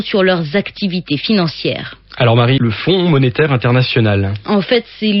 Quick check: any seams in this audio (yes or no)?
yes